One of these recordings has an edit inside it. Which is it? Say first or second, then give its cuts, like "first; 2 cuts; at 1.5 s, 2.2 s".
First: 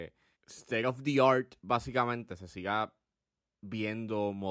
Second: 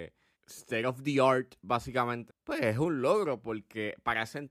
second; 1 cut; at 2.3 s